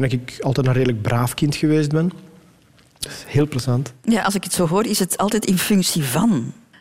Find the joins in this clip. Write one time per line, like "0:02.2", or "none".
0:03.1

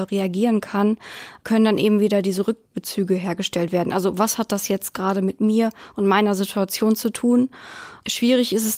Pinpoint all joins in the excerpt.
none

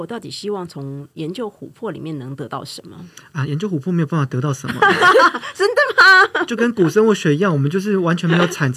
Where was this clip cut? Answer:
none

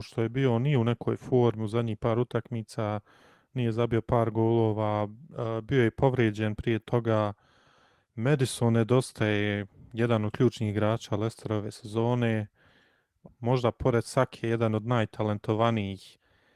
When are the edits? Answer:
0:13.3

